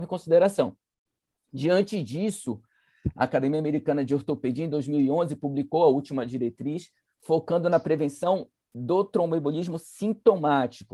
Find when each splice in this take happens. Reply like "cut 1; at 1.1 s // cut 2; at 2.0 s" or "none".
none

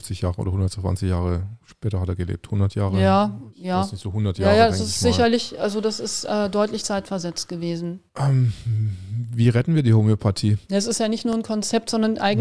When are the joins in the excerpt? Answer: cut 1; at 8.1 s // cut 2; at 10.7 s

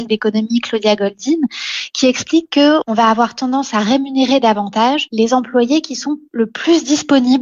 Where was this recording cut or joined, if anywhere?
none

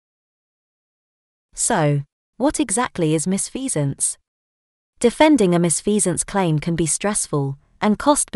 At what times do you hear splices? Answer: cut 1; at 2.3 s // cut 2; at 4.8 s

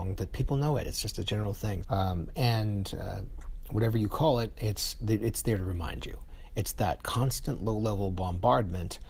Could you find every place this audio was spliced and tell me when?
cut 1; at 1.8 s

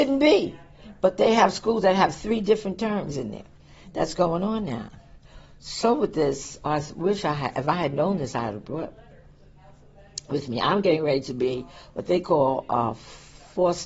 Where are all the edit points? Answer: none

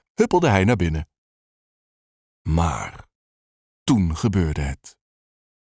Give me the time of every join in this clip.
none

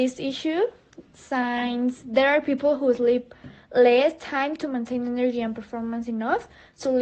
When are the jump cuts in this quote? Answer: none

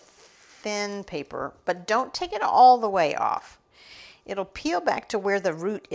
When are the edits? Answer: none

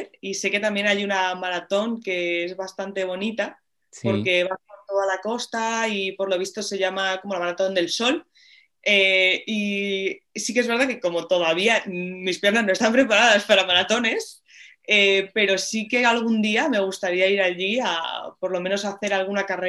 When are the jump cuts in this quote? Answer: none

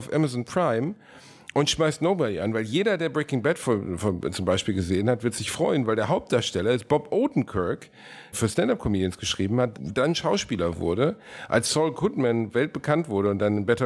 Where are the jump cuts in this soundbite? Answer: cut 1; at 8.3 s // cut 2; at 9.7 s

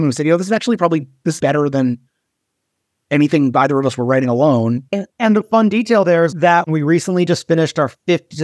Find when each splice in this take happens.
cut 1; at 1.4 s // cut 2; at 4.9 s // cut 3; at 6.3 s

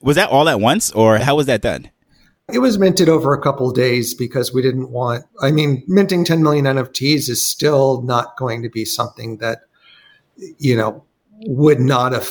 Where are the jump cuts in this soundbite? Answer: cut 1; at 5.3 s

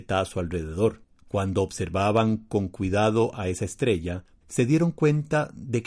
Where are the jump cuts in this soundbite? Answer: cut 1; at 4.4 s

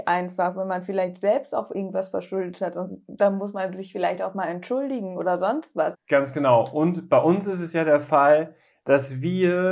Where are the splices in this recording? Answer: cut 1; at 5.9 s

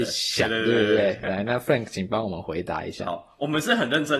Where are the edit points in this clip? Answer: none

